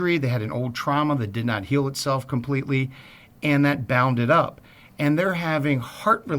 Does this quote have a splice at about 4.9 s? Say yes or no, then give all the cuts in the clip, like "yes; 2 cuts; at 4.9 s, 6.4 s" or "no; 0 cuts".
no; 0 cuts